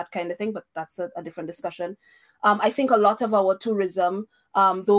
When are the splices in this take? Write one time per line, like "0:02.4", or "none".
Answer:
none